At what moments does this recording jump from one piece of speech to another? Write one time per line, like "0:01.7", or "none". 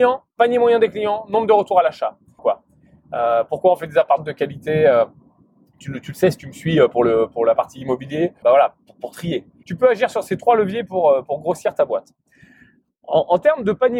0:02.4
0:08.4
0:09.6